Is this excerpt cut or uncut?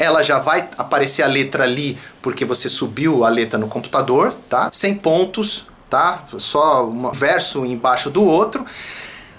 cut